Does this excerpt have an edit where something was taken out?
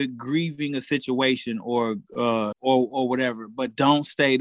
yes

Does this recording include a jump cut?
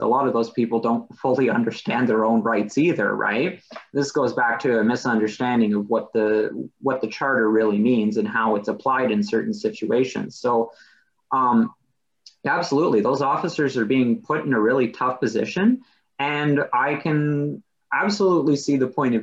no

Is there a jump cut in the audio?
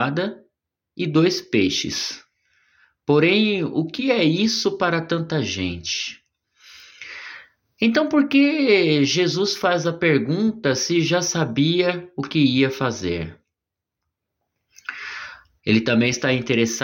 yes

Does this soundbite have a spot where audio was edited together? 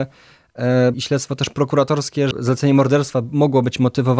yes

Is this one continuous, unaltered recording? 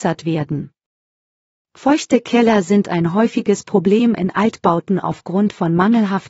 yes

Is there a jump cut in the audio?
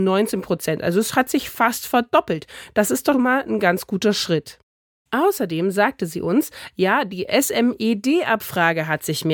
yes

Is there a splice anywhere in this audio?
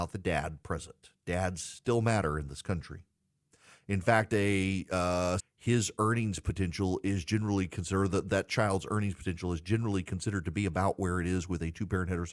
yes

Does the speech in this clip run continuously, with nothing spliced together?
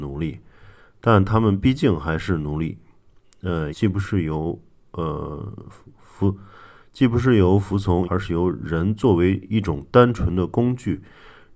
no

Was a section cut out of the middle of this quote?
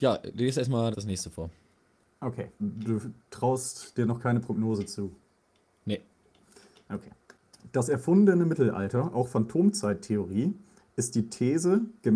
yes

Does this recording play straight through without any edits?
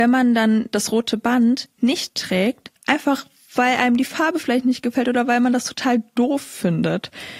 no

